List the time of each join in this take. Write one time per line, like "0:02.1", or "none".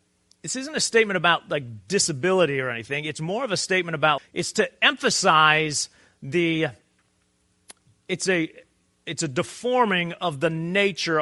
0:04.2